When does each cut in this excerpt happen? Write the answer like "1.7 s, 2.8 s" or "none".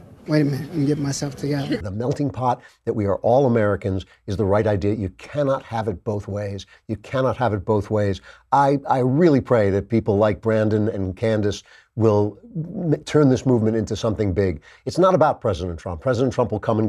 1.8 s